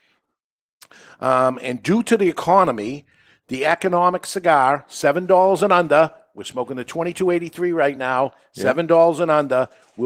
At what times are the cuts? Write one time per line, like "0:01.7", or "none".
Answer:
none